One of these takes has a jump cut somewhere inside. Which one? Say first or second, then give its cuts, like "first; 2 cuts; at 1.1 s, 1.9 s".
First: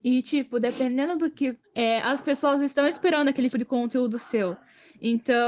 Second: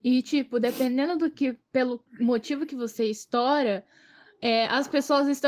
first; 2 cuts; at 1.6 s, 3.5 s